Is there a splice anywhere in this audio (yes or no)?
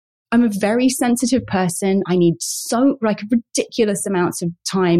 no